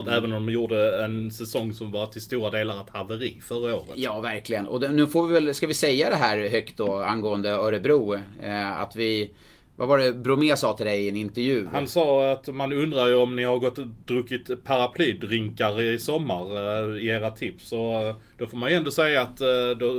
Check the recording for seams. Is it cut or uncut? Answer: uncut